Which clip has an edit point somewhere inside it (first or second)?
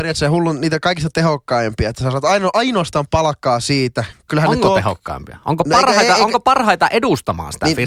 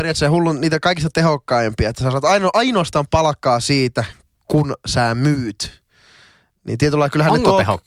first